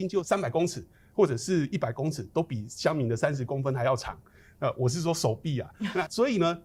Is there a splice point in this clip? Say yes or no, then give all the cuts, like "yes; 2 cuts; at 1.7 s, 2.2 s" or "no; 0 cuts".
no; 0 cuts